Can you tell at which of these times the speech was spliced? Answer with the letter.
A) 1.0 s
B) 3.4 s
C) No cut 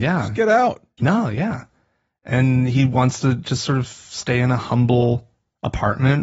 A